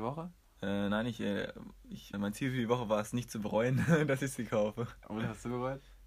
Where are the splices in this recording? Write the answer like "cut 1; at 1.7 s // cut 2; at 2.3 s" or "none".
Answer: cut 1; at 2.1 s